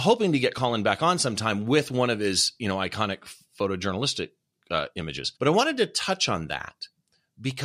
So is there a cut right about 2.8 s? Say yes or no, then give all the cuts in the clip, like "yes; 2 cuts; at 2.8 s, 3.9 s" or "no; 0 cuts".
no; 1 cut; at 5.4 s